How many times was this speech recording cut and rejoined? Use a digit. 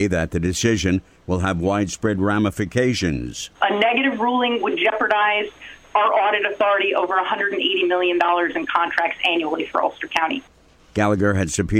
1